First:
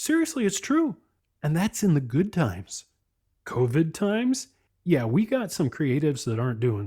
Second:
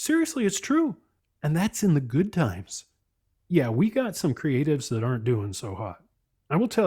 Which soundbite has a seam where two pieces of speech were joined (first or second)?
second